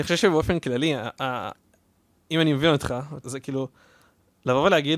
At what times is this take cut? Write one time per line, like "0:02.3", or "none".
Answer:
0:03.2